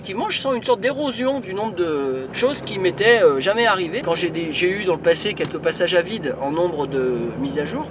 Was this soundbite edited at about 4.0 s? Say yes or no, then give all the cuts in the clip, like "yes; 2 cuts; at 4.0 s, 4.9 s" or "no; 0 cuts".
yes; 2 cuts; at 2.3 s, 4.0 s